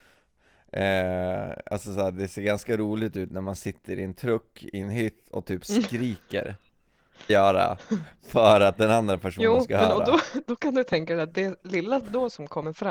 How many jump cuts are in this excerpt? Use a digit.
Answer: 1